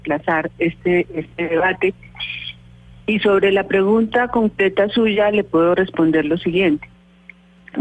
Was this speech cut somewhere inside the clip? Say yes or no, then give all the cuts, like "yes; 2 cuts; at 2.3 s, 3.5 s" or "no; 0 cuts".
no; 0 cuts